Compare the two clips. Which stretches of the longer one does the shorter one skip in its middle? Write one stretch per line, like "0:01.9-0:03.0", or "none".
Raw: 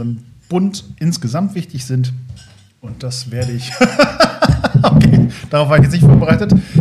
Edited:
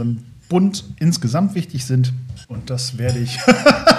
0:02.4-0:02.8